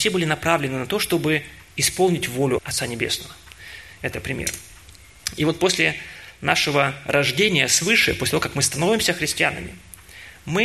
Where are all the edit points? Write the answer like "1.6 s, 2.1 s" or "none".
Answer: 2.6 s